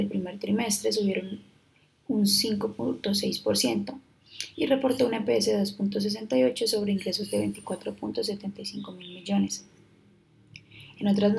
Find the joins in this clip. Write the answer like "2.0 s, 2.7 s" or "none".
none